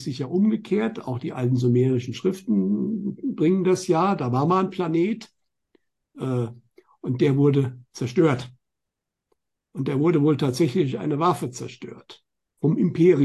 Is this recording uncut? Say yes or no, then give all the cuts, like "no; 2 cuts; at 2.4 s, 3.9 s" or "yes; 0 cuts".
yes; 0 cuts